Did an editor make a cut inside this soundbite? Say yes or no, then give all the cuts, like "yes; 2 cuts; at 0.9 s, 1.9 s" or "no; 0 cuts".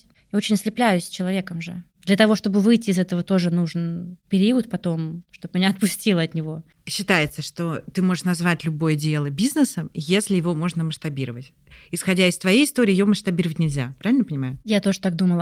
no; 0 cuts